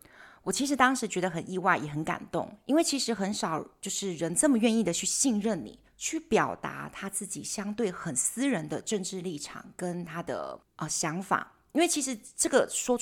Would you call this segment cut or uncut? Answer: cut